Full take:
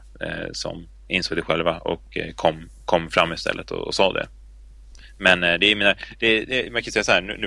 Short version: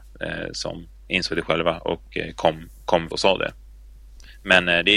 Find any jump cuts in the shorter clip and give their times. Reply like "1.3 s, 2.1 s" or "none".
3.1 s